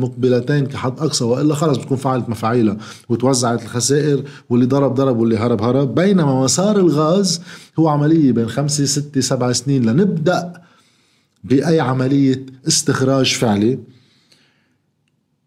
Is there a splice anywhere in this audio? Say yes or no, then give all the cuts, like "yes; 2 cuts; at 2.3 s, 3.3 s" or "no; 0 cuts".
no; 0 cuts